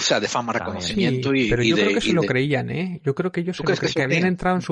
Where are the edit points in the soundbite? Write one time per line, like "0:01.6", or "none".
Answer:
none